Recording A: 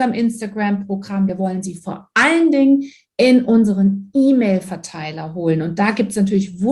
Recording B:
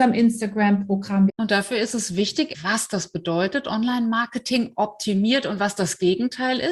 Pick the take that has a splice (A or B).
B